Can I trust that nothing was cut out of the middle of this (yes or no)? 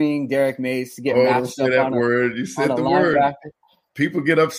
yes